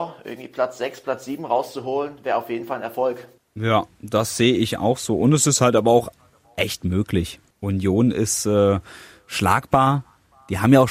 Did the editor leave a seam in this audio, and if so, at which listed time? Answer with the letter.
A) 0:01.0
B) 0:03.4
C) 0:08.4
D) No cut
D